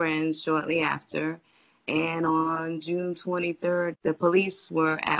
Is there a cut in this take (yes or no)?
yes